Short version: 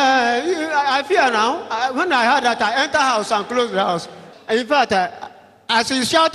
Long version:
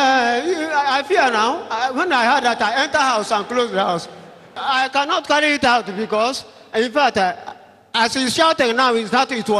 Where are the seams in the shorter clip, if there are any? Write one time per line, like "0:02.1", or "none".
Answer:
0:04.3